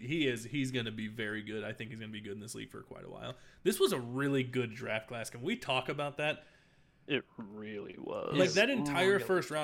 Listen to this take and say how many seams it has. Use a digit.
0